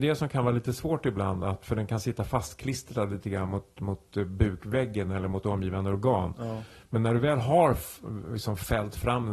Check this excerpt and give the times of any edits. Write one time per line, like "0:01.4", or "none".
none

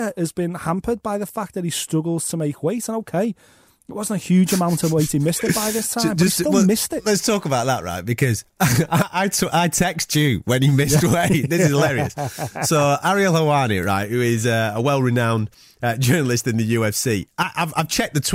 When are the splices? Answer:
none

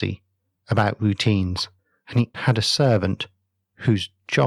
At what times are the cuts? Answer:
0:02.3

